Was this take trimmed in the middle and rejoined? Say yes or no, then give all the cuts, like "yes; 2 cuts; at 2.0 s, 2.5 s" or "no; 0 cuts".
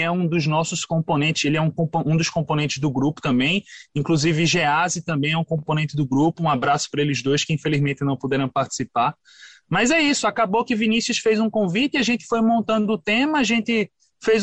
no; 0 cuts